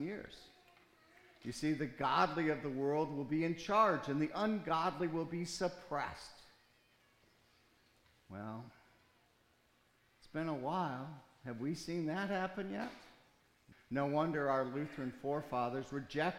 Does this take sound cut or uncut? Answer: cut